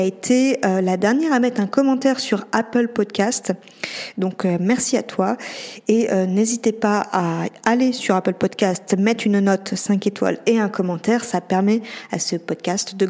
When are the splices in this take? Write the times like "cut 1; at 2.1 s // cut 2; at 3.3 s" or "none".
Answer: none